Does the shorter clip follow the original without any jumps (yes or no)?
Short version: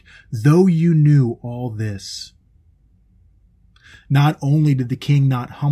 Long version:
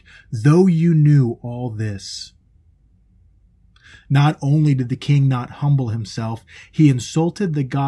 yes